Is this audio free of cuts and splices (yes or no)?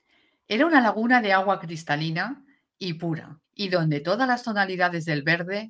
no